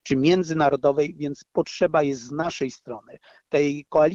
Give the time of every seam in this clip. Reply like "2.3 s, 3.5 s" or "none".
none